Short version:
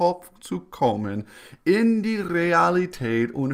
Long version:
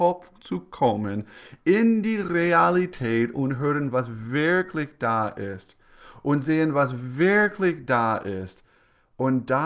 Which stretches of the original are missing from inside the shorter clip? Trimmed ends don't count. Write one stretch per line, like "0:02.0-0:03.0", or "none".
none